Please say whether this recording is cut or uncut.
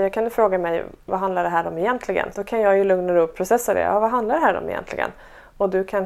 cut